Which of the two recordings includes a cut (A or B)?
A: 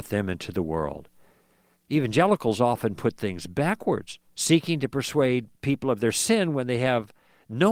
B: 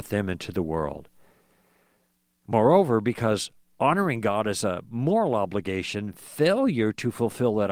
A